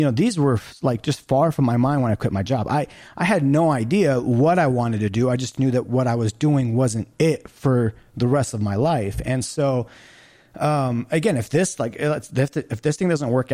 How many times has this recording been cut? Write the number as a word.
one